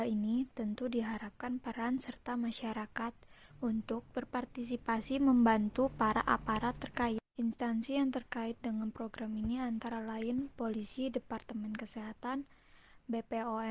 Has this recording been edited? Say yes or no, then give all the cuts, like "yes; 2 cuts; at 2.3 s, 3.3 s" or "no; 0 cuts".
yes; 2 cuts; at 3.5 s, 7.3 s